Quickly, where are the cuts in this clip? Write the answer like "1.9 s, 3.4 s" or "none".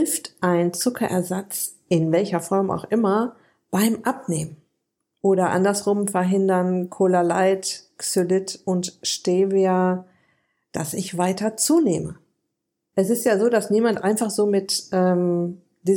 none